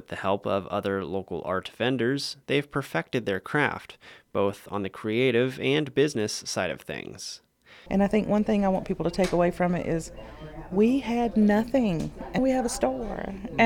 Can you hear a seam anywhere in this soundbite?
yes; 2 cuts; at 7.9 s, 12.4 s

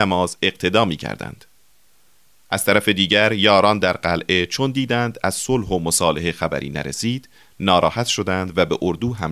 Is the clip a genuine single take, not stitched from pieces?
yes; 0 cuts

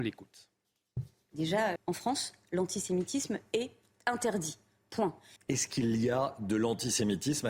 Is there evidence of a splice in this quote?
yes; 2 cuts; at 1.8 s, 5.4 s

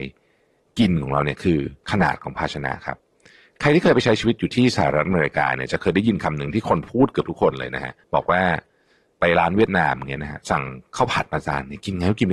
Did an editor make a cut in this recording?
yes; 2 cuts; at 1.8 s, 8.0 s

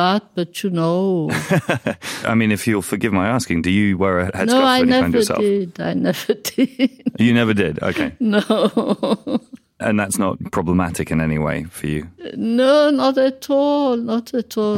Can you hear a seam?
no; 0 cuts

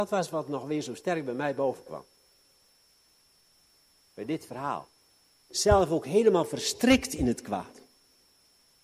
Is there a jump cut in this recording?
yes; 1 cut; at 5.5 s

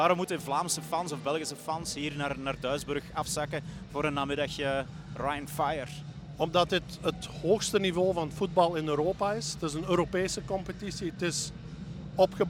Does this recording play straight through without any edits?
yes; 0 cuts

